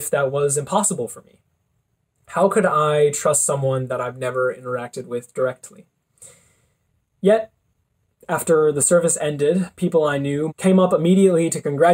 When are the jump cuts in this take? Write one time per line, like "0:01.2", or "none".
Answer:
0:10.5